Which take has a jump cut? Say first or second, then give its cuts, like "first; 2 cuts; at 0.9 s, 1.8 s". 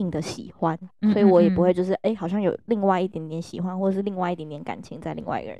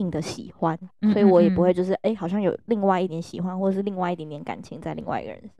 second; 1 cut; at 3.1 s